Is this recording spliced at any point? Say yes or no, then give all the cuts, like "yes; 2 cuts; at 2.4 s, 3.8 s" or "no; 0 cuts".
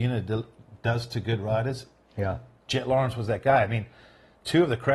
yes; 1 cut; at 2.7 s